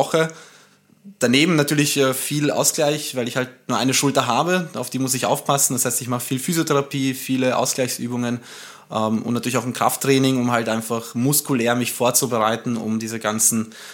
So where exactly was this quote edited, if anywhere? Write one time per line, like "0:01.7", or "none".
none